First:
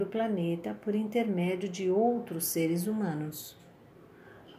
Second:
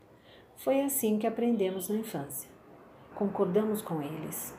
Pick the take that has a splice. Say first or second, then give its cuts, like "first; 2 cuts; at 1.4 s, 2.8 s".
second; 1 cut; at 3.1 s